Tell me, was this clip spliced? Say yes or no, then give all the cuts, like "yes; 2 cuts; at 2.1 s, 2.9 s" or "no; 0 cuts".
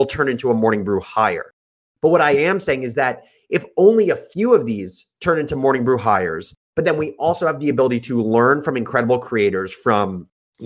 no; 0 cuts